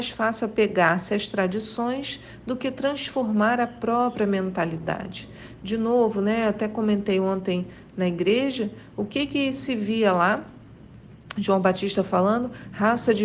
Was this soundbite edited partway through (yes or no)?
no